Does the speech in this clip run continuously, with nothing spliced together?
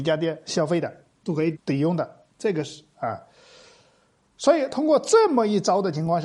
no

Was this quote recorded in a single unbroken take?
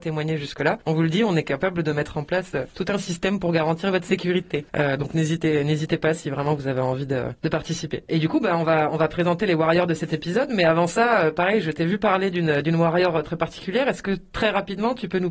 yes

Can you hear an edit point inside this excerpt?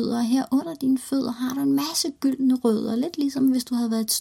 no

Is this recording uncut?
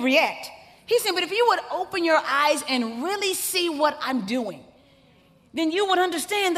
yes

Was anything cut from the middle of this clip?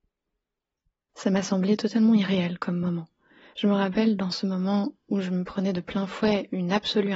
yes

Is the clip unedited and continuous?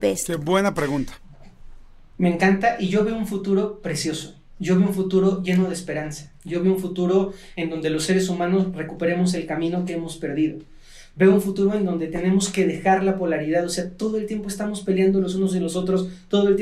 yes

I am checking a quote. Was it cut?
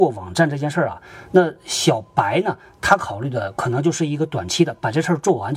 no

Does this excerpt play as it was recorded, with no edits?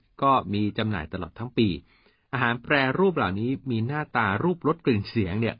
yes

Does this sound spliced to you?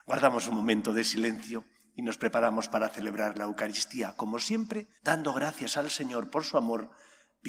yes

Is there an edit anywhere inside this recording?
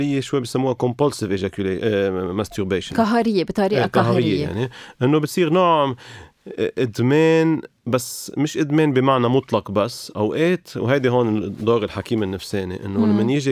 no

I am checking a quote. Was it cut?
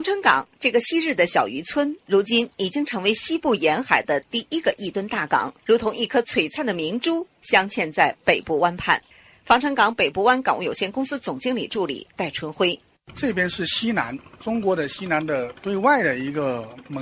no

